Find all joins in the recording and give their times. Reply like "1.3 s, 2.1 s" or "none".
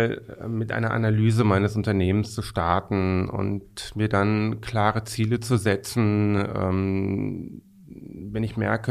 none